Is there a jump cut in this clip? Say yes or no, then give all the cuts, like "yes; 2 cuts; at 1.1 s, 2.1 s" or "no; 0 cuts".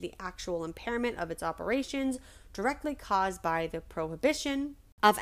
no; 0 cuts